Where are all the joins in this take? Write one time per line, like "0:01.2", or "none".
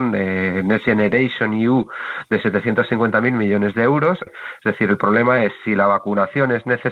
0:04.3